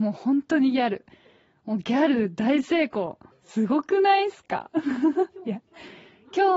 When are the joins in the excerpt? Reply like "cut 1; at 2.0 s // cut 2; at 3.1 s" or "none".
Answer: cut 1; at 3.3 s